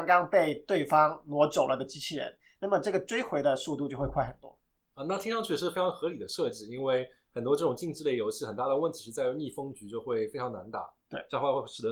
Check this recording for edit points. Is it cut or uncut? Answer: uncut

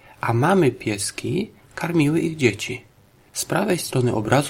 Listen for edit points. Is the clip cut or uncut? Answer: cut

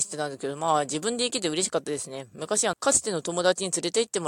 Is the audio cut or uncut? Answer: cut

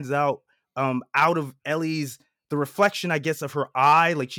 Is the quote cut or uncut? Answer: uncut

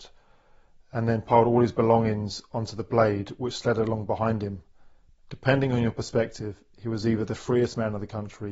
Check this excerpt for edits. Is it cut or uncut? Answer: uncut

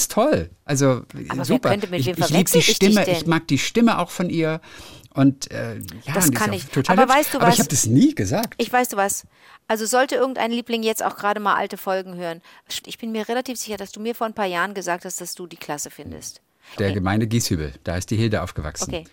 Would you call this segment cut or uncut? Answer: cut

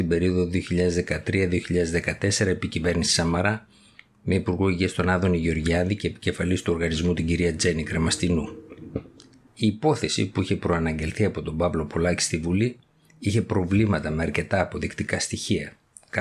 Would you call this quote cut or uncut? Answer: cut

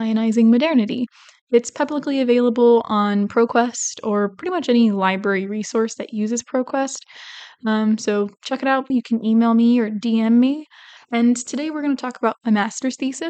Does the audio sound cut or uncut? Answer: cut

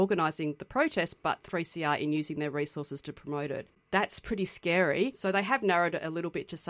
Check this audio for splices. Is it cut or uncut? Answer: cut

